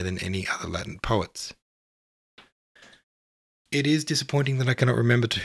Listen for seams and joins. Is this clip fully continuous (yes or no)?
yes